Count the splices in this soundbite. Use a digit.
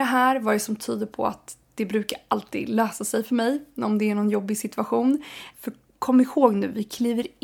1